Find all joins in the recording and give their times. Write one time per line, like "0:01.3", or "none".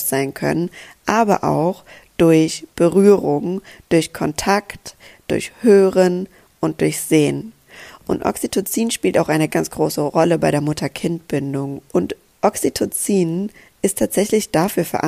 0:09.5
0:11.9